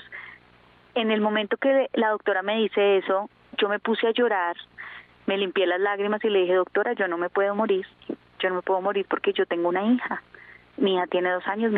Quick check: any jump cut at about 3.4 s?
no; 0 cuts

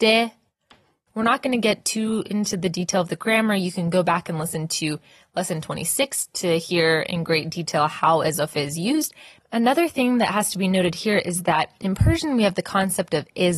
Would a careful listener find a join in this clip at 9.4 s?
yes; 2 cuts; at 1.1 s, 9.4 s

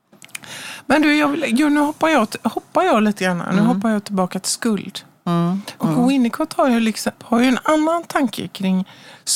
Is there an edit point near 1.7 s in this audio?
no; 2 cuts; at 5.8 s, 7.2 s

